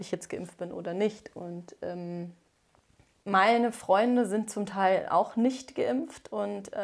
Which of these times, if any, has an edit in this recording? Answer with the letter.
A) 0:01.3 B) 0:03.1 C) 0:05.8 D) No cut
D